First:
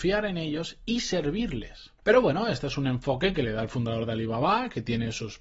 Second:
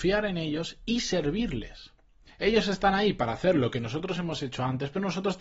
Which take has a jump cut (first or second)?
first